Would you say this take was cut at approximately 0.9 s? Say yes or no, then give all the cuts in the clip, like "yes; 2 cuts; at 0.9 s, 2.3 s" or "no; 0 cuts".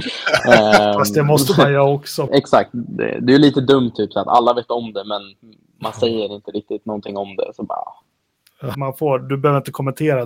no; 2 cuts; at 2.3 s, 8.7 s